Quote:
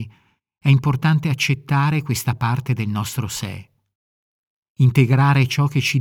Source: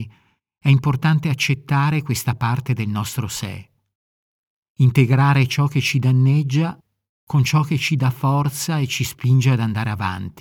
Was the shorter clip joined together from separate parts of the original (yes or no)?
no